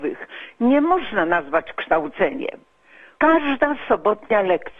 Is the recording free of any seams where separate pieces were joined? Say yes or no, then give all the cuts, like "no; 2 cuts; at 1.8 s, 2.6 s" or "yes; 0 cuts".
no; 1 cut; at 3.2 s